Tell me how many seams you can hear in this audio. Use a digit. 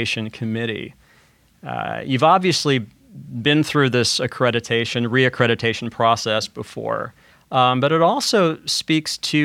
1